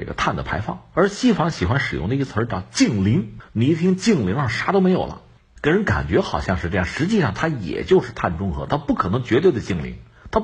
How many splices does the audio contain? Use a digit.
1